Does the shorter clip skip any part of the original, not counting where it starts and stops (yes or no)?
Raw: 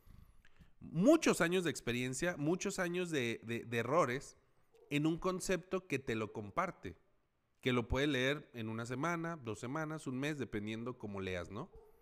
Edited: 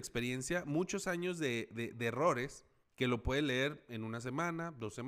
yes